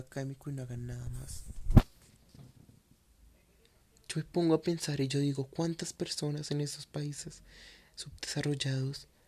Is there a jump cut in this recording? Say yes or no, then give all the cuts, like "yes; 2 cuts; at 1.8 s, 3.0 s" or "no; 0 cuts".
no; 0 cuts